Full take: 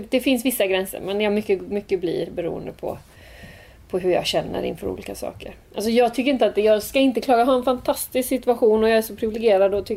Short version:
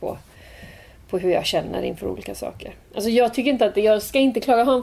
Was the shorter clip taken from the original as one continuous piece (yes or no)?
yes